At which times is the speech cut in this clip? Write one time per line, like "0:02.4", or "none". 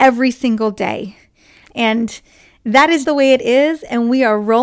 0:01.6
0:03.0